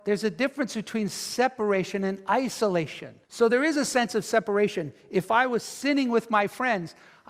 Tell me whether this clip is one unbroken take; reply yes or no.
no